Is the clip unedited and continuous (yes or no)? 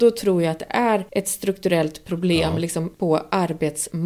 yes